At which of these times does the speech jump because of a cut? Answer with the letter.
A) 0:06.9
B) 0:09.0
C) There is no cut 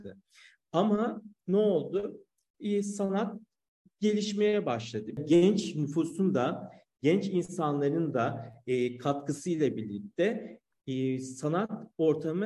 C